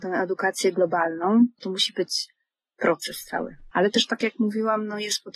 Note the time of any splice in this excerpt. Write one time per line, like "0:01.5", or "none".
0:01.6
0:03.7